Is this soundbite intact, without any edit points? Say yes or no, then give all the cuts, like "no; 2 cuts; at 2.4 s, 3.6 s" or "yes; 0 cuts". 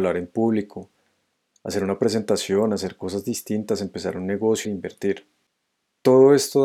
no; 1 cut; at 4.6 s